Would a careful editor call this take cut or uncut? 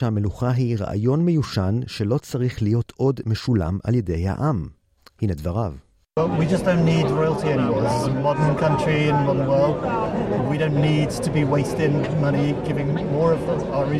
uncut